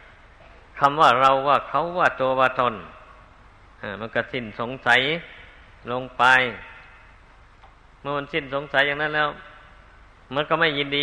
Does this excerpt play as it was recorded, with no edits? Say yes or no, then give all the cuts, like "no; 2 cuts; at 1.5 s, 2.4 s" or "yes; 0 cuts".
yes; 0 cuts